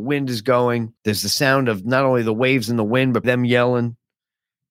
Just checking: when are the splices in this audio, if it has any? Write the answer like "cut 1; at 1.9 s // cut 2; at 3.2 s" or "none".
cut 1; at 1.0 s // cut 2; at 3.2 s